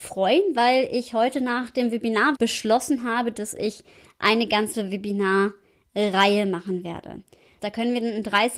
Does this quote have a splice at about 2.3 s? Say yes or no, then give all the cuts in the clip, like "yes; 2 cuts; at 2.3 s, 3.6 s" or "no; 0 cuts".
yes; 2 cuts; at 2.3 s, 7.6 s